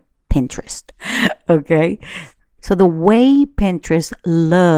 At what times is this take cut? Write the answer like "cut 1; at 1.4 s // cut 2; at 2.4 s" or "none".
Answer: cut 1; at 0.9 s